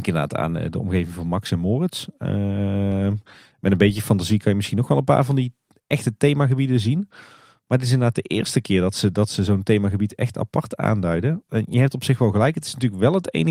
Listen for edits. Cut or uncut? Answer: uncut